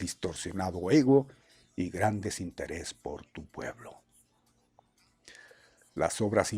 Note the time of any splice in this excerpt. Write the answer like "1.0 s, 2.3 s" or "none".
none